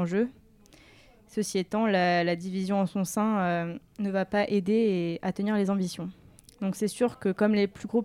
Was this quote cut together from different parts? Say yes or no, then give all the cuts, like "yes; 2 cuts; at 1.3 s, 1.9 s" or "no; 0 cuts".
no; 0 cuts